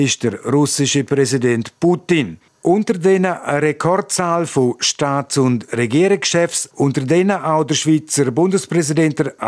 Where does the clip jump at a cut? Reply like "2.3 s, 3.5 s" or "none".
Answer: 2.5 s, 6.7 s